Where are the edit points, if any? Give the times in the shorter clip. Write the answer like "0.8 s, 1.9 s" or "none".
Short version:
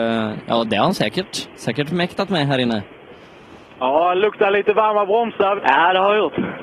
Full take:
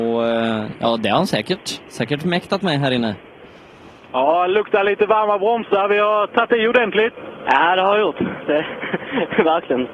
5.6 s